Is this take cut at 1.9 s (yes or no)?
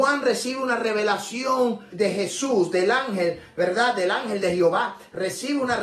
yes